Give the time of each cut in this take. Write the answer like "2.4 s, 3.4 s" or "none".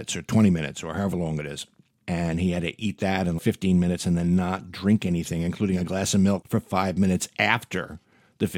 2.0 s, 3.4 s